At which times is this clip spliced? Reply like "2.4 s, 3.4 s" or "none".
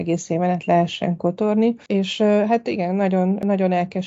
1.9 s